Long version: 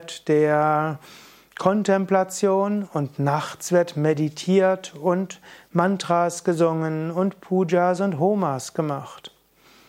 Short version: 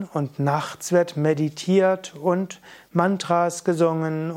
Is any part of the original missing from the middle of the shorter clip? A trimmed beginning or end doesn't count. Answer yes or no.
no